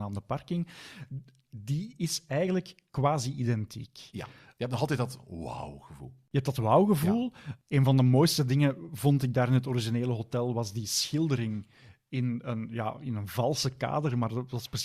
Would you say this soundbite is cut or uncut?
uncut